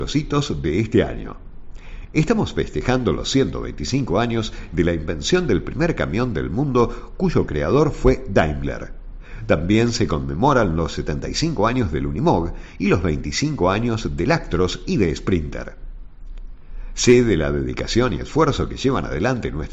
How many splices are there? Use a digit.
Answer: 0